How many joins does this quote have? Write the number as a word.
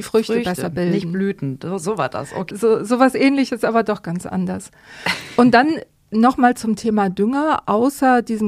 one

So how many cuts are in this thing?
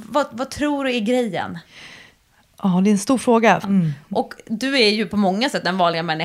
one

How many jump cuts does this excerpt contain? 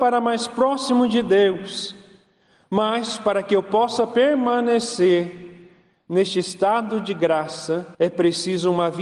one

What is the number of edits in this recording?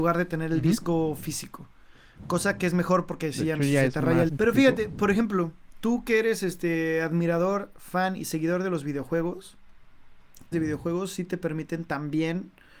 two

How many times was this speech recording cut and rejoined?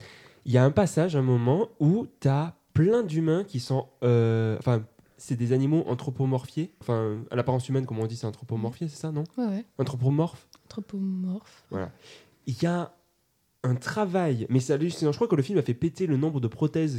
one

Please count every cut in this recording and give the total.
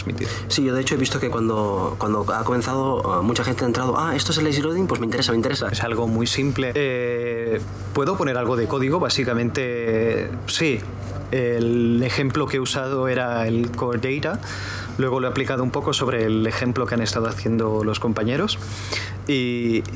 two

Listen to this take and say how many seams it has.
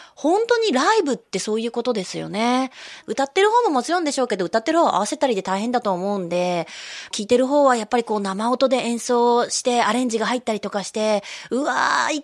two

